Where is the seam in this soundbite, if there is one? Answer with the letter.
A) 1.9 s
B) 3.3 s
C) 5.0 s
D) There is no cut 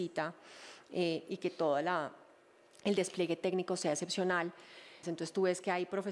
C